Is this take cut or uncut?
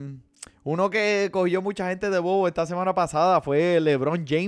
uncut